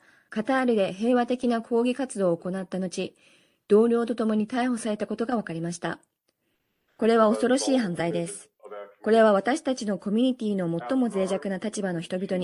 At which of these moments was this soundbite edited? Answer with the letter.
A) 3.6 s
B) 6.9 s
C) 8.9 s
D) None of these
B